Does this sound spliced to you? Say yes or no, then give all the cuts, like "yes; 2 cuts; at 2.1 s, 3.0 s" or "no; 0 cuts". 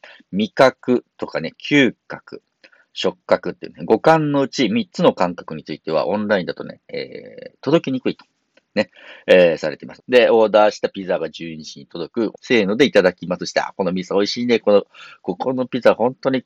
yes; 2 cuts; at 10.0 s, 12.3 s